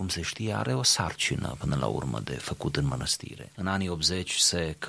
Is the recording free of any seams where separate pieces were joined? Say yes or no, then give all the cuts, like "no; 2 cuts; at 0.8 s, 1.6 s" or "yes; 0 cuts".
no; 1 cut; at 3.5 s